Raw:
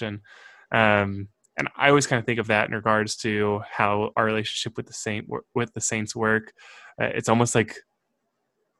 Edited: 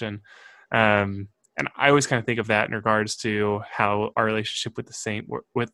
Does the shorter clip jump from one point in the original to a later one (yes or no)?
no